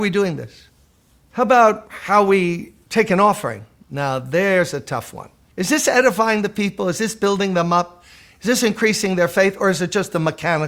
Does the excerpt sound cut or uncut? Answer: uncut